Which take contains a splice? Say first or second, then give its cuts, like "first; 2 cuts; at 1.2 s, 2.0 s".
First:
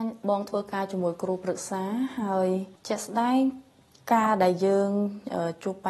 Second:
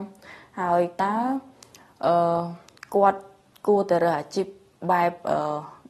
first; 1 cut; at 2.8 s